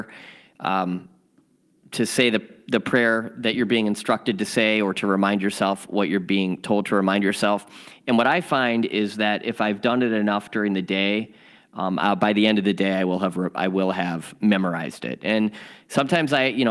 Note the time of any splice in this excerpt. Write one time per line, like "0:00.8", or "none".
none